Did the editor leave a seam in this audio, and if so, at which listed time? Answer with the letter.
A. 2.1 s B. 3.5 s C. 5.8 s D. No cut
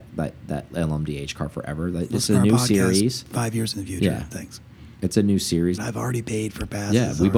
C